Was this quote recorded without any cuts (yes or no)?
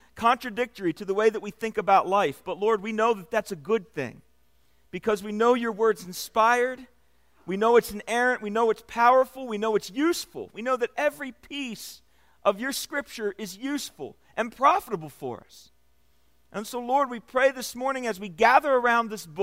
yes